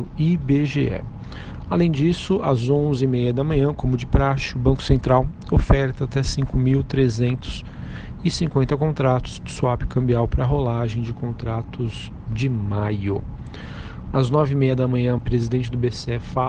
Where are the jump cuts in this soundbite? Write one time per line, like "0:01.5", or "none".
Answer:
0:14.1
0:15.2